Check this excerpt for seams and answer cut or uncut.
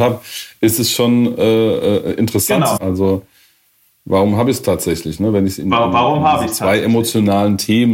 cut